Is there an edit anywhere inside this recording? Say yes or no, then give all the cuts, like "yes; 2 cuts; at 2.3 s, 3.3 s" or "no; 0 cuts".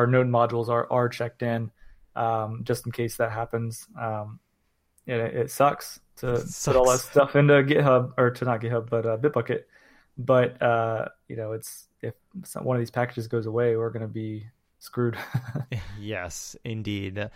no; 0 cuts